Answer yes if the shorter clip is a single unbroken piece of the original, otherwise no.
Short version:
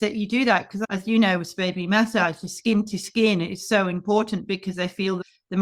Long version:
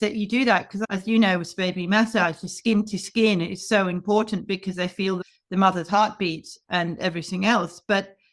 yes